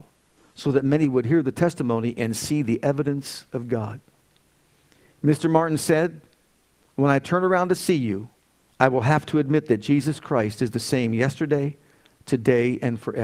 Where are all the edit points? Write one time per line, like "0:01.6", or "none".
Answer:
none

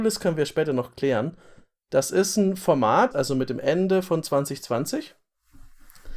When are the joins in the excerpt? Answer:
0:01.8
0:03.1

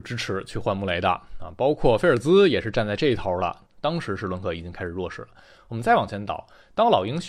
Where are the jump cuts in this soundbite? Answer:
0:03.7

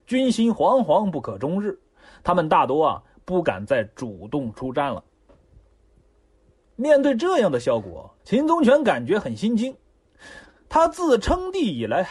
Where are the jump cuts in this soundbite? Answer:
0:08.2

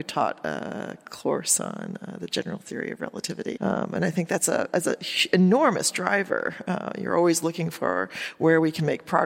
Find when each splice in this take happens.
0:03.6

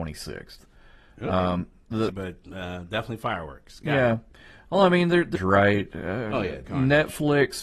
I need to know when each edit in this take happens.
0:02.1
0:05.4
0:06.7

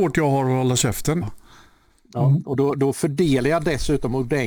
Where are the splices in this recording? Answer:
0:01.2

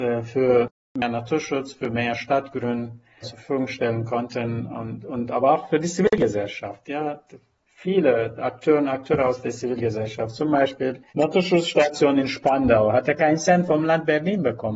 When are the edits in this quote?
0:03.2
0:11.1

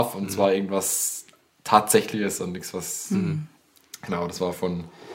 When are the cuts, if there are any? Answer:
none

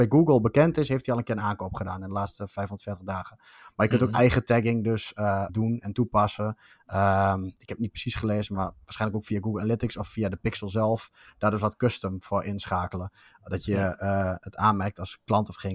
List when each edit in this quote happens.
0:05.5

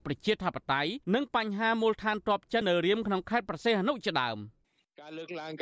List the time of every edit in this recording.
0:01.0
0:02.6

